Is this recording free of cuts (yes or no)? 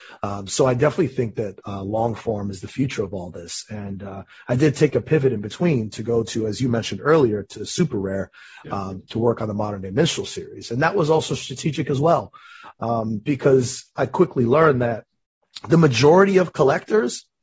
yes